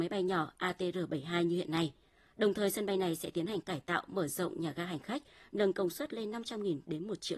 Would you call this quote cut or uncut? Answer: uncut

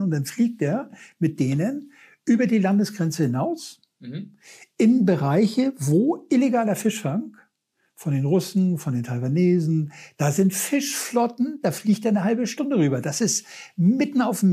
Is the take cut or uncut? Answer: uncut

